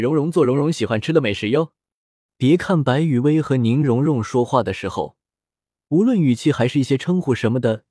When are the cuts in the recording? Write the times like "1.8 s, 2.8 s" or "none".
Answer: 2.3 s